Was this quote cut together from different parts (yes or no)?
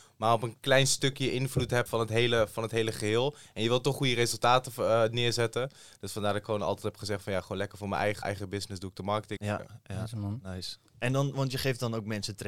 yes